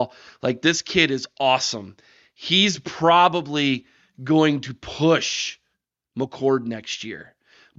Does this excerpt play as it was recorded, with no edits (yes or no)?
yes